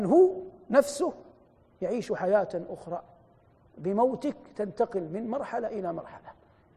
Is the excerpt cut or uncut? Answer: uncut